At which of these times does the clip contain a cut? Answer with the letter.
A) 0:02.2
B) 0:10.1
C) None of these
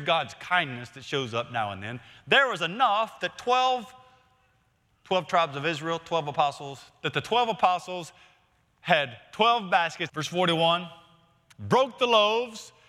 B